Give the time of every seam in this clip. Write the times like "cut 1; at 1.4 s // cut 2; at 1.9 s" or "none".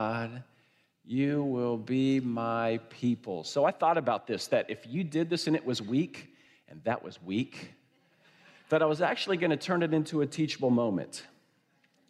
none